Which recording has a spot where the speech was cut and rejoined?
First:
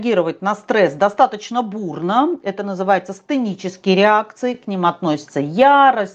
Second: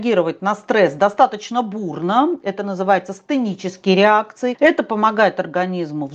second; 1 cut; at 4.5 s

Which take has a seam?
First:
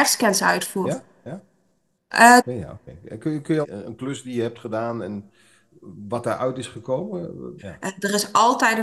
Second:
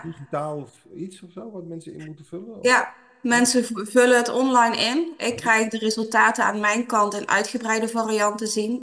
first; 3 cuts; at 2.4 s, 3.6 s, 7.6 s

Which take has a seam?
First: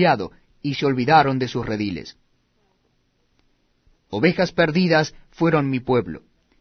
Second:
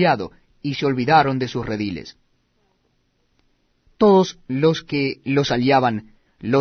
first; 1 cut; at 3.9 s

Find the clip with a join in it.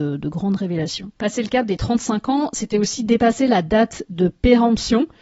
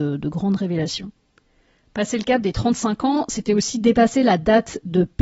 first; 1 cut; at 1.2 s

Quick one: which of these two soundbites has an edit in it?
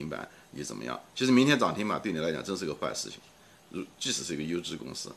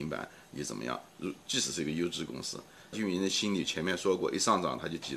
second; 2 cuts; at 1.1 s, 2.9 s

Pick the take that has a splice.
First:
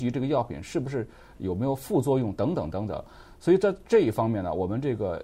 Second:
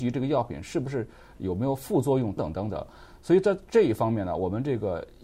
second; 1 cut; at 2.4 s

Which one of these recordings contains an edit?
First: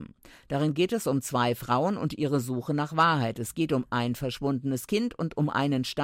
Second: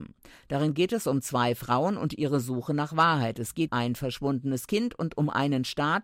second; 1 cut; at 3.7 s

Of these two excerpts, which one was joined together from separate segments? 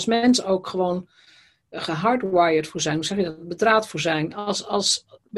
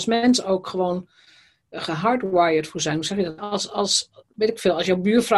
second; 1 cut; at 3.4 s

